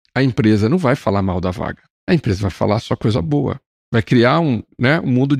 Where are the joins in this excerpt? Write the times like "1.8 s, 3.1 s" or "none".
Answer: none